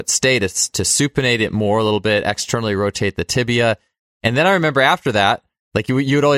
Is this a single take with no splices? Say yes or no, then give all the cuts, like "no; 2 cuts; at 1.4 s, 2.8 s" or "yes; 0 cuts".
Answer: yes; 0 cuts